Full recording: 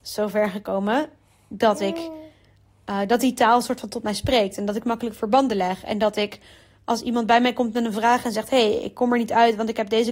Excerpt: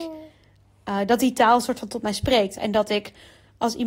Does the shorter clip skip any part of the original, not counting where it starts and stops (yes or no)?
yes